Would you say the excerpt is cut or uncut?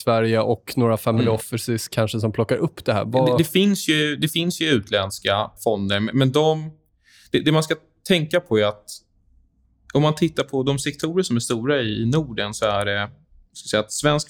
cut